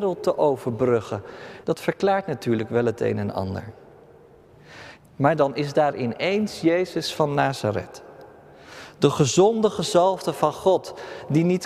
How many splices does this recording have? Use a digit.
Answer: 2